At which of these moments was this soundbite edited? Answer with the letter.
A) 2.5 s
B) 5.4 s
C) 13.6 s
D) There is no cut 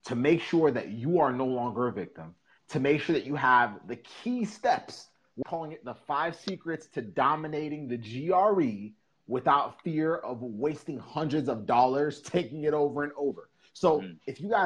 B